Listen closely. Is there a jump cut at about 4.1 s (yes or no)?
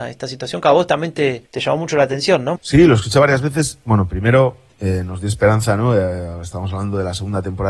no